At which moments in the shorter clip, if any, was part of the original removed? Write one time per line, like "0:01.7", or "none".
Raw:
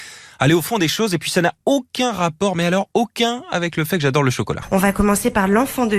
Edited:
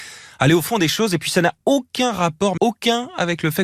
0:02.6